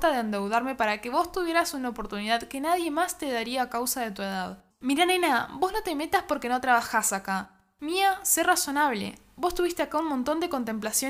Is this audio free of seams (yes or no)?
no